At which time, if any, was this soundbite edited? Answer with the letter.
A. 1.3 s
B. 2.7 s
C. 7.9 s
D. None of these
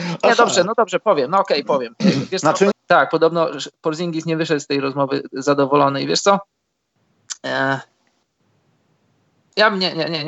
B